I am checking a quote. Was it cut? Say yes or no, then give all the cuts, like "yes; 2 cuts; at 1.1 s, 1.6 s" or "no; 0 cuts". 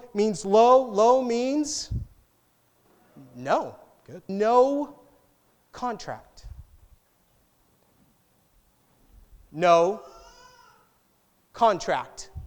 yes; 1 cut; at 4.3 s